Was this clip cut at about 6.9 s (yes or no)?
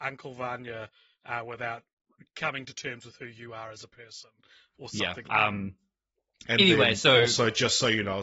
no